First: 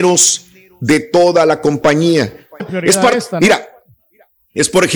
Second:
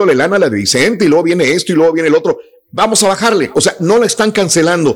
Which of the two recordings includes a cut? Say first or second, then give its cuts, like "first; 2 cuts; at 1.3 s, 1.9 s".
first; 1 cut; at 2.6 s